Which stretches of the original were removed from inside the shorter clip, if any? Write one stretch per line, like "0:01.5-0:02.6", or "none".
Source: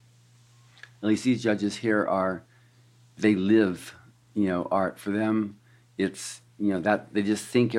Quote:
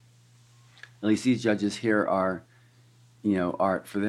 0:03.1-0:04.2